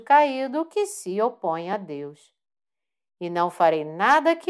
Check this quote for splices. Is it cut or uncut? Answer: uncut